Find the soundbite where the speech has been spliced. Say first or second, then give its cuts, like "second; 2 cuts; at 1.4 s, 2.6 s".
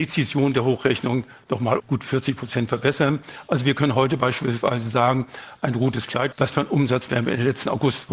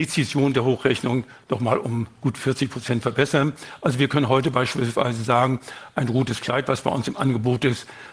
first; 2 cuts; at 1.8 s, 6.3 s